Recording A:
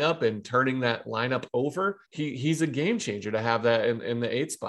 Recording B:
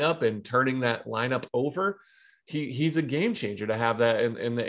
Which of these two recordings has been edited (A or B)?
A